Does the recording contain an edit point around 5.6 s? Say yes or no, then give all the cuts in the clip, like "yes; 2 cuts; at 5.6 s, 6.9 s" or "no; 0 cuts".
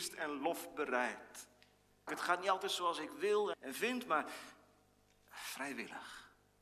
no; 2 cuts; at 2.1 s, 3.5 s